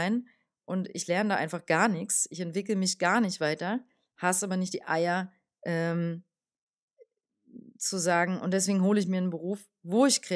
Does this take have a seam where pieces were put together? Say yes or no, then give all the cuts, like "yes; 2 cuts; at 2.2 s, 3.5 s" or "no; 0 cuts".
no; 0 cuts